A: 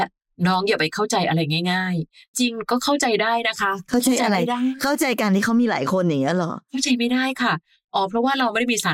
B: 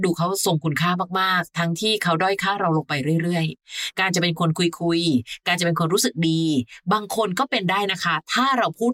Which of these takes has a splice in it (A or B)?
A